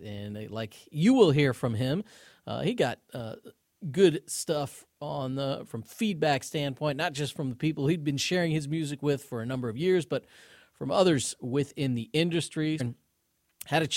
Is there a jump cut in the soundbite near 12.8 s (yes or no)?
yes